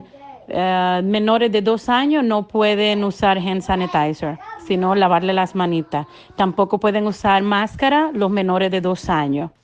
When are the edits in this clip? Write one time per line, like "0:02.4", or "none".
none